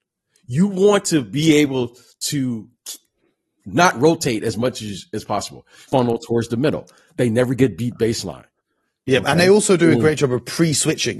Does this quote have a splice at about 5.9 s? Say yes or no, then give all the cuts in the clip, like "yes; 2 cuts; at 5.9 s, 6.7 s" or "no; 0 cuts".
yes; 1 cut; at 5.9 s